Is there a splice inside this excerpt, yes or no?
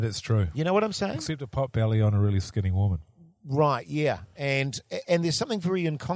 no